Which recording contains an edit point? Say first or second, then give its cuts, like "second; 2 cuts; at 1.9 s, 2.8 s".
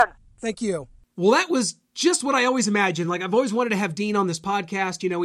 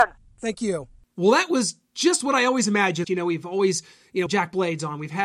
second; 2 cuts; at 3.0 s, 4.3 s